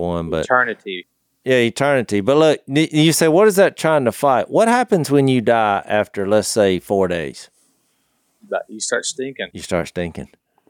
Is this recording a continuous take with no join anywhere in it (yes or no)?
yes